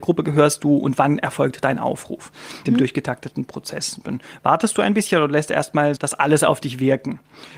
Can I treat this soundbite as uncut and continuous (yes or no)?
no